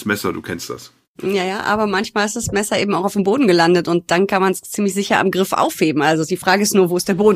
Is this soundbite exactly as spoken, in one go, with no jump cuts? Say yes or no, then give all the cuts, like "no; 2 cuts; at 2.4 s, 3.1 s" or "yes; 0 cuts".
yes; 0 cuts